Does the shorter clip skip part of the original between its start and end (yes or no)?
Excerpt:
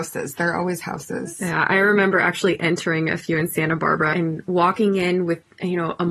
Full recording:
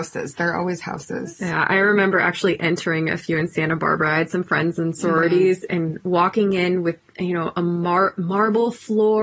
yes